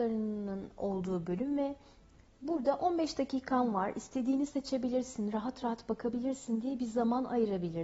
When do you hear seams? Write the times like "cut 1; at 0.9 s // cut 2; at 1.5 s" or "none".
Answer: none

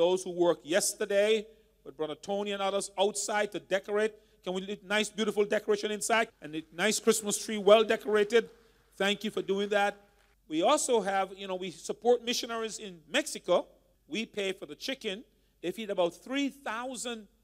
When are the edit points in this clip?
cut 1; at 6.3 s // cut 2; at 10.3 s // cut 3; at 13.9 s

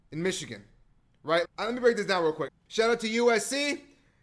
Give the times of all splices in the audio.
cut 1; at 1.4 s // cut 2; at 2.5 s

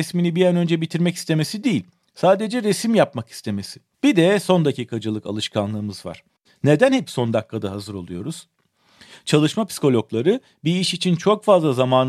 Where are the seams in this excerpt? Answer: cut 1; at 3.9 s

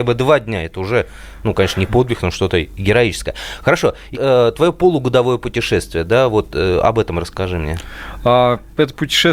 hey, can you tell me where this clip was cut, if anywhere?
cut 1; at 4.1 s

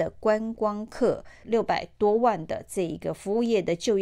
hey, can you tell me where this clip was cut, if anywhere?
cut 1; at 1.4 s

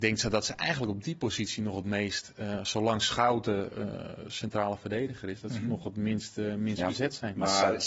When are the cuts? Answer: none

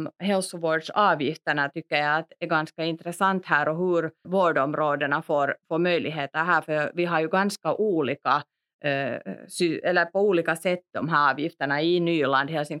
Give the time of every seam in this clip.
cut 1; at 4.2 s

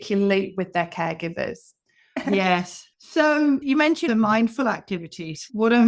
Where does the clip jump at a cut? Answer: cut 1; at 2.9 s // cut 2; at 4.1 s

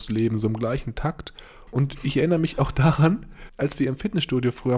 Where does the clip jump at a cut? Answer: cut 1; at 1.7 s // cut 2; at 3.5 s

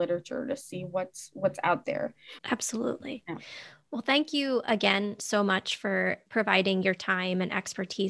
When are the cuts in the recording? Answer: none

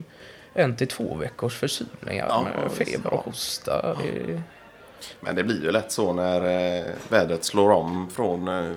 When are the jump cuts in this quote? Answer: none

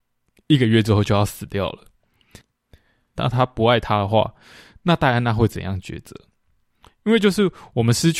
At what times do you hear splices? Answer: cut 1; at 3.1 s // cut 2; at 6.9 s

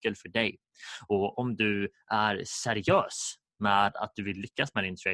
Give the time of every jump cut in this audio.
none

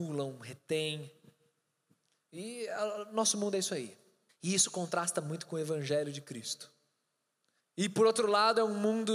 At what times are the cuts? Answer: cut 1; at 4.3 s // cut 2; at 7.6 s

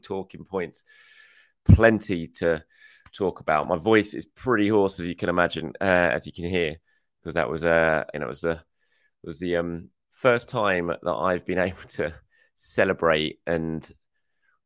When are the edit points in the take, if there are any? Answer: cut 1; at 8.1 s

